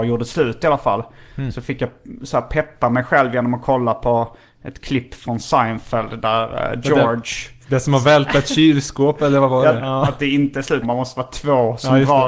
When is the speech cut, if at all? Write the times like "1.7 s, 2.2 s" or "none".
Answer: 9.8 s, 10.8 s